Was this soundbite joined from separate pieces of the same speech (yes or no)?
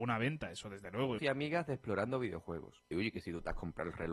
yes